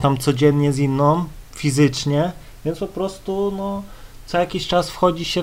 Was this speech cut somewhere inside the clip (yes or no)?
no